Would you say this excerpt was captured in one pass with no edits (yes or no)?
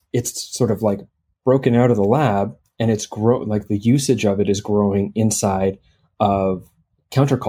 yes